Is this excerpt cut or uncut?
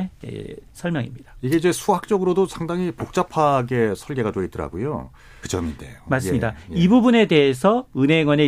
cut